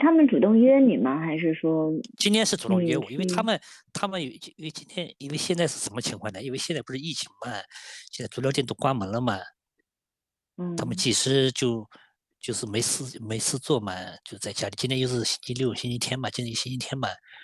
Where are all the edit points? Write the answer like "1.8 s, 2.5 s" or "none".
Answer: none